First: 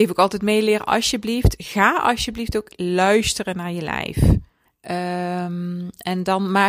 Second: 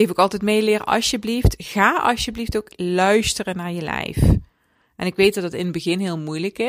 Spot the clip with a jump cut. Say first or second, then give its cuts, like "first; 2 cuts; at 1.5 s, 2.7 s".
first; 1 cut; at 4.7 s